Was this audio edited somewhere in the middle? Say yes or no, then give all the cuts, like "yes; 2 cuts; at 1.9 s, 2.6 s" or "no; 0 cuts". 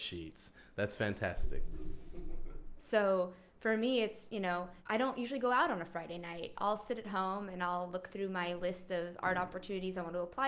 yes; 2 cuts; at 2.8 s, 4.8 s